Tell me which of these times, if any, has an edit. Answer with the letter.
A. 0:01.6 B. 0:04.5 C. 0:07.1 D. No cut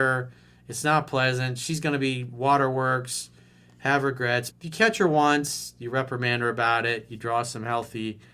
B